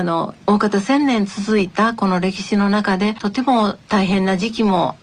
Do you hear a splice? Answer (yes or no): yes